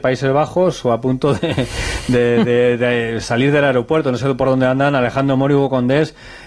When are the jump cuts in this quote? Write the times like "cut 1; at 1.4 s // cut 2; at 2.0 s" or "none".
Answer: none